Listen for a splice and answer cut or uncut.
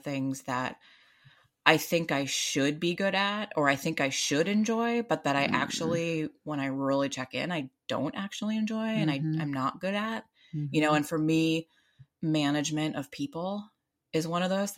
uncut